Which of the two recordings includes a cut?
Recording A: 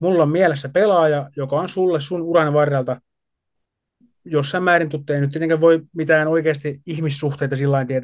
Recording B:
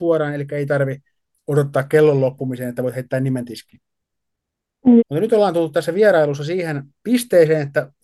B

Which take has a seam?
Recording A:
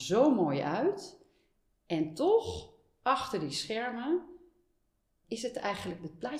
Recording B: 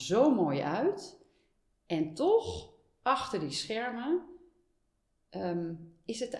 A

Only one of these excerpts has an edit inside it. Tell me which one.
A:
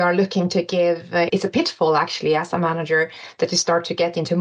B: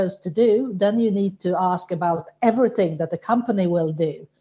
A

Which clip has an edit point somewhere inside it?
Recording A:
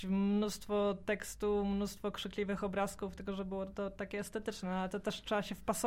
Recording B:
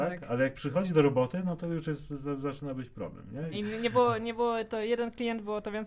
B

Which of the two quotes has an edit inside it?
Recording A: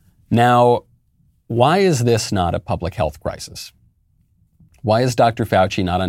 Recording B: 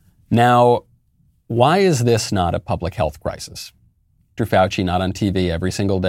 B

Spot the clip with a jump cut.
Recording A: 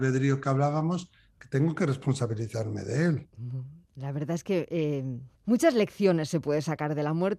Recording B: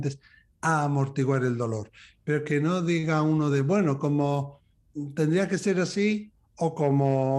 A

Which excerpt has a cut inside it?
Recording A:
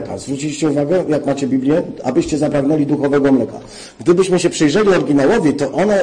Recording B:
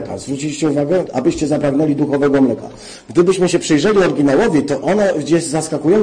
B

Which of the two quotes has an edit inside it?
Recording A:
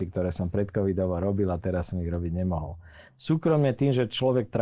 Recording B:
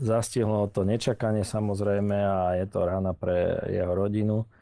A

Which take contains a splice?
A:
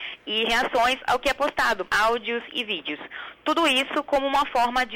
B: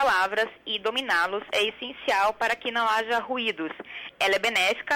A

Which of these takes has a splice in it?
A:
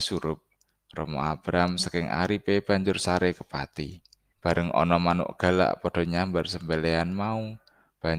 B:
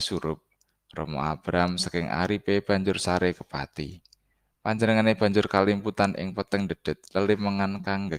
A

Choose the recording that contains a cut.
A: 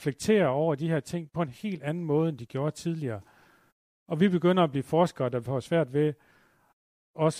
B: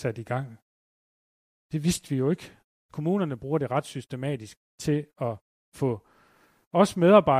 B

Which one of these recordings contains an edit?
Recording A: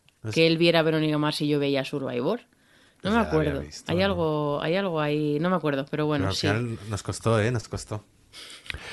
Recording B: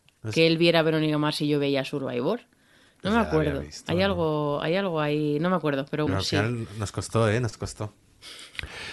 B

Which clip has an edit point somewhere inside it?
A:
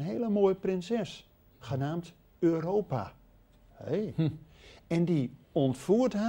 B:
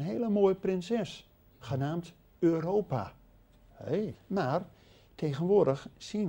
B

